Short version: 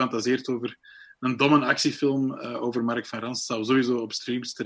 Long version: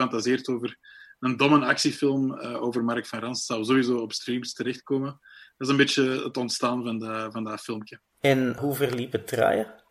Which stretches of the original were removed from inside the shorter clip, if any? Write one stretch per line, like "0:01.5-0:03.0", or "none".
none